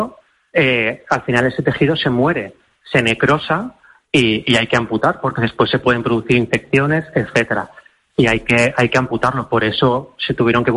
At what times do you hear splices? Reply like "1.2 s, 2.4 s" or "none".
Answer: none